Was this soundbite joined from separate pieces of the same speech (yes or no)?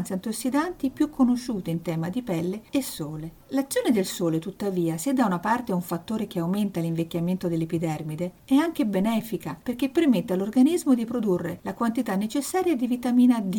no